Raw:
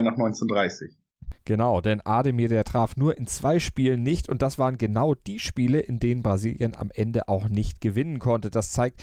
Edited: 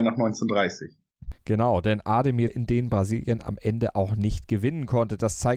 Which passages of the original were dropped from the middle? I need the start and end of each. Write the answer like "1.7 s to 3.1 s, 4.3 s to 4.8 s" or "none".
2.5 s to 5.8 s